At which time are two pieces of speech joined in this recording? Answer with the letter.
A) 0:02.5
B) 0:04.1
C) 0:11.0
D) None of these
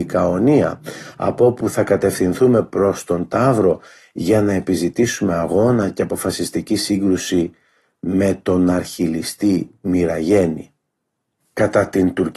D